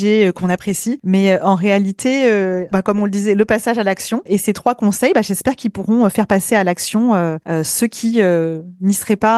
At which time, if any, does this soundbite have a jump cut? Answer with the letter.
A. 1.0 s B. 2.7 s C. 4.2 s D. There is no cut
B